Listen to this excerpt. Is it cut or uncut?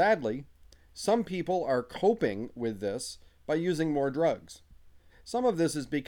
cut